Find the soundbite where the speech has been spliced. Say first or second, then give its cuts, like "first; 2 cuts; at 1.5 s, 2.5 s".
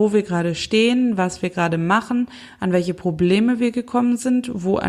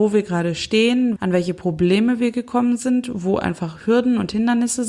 second; 1 cut; at 1.2 s